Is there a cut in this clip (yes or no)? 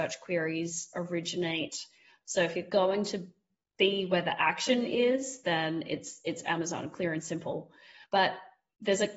no